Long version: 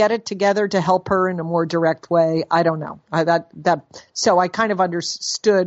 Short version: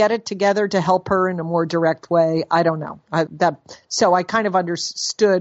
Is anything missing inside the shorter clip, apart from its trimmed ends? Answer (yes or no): yes